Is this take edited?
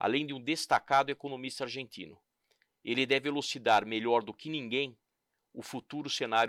no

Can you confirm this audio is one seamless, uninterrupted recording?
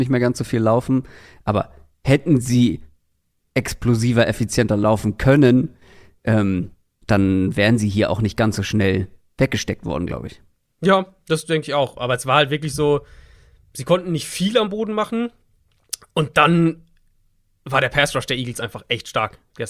yes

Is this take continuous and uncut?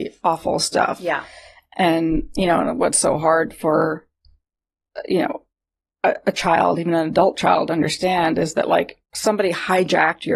no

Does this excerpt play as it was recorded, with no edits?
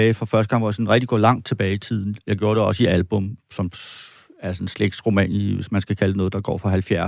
yes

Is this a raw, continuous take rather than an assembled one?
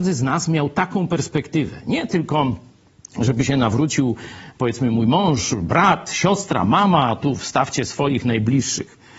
yes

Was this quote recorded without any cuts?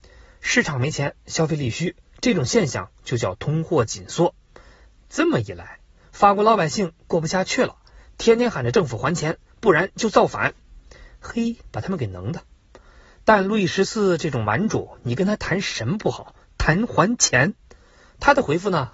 yes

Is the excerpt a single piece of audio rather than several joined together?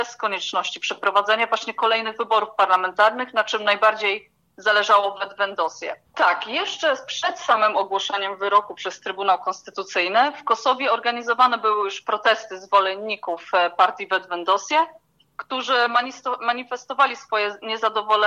no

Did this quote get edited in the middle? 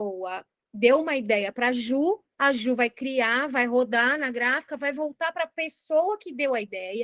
no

